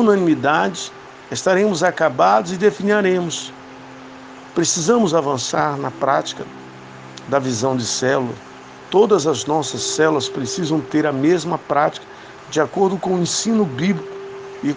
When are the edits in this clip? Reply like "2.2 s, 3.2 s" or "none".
none